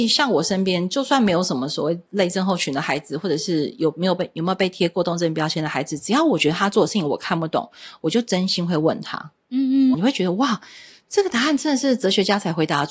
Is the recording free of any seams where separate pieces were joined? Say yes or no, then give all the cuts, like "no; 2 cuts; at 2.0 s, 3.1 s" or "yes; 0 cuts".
no; 1 cut; at 9.9 s